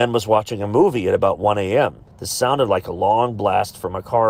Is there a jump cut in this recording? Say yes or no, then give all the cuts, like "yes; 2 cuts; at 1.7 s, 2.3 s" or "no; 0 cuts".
yes; 1 cut; at 2.1 s